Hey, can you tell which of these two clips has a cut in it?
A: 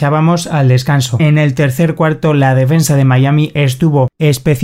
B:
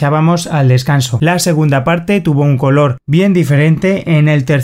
A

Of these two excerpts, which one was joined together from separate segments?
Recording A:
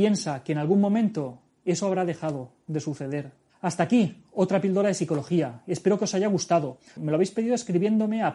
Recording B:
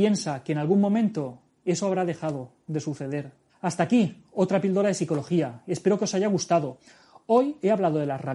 A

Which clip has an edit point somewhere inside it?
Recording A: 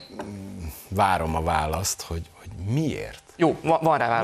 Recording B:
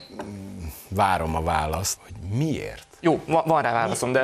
B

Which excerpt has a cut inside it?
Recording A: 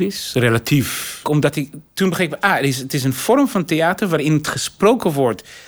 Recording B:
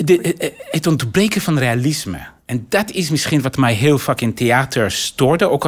A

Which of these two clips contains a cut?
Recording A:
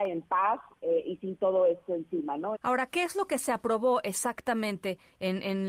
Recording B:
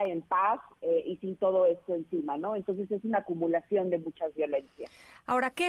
A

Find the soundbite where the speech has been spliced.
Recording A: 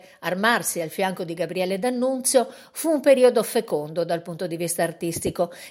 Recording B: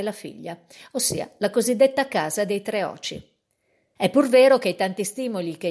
B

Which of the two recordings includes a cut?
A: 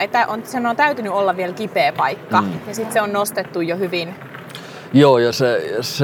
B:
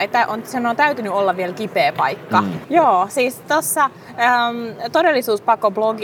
B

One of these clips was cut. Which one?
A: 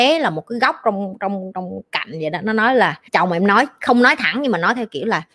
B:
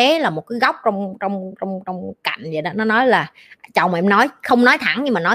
A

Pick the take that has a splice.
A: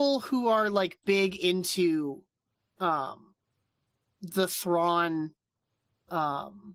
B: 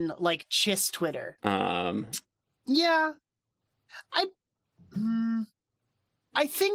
B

